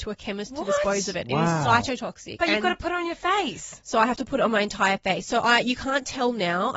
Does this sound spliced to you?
no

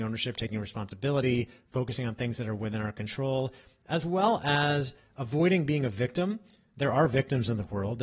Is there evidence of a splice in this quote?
no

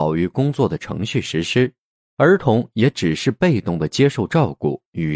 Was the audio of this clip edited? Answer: no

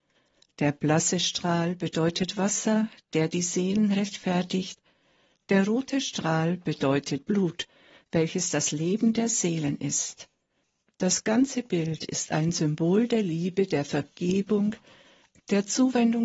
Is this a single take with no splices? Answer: yes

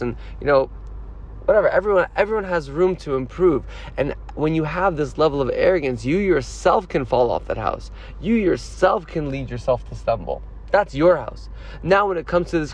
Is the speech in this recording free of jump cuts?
yes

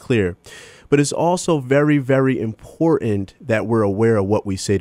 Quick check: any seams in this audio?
no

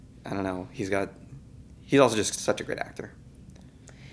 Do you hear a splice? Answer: no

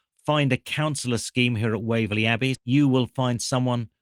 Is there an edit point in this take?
yes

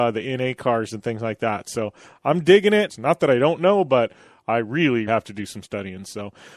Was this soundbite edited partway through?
yes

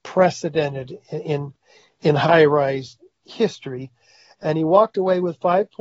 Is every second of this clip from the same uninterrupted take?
yes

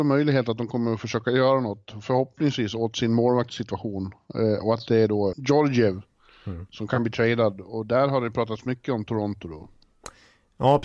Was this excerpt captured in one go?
no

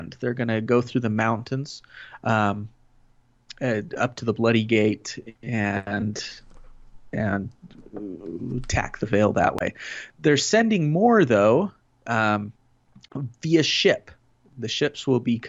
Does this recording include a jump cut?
no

